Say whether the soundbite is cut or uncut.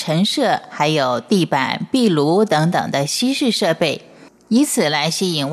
uncut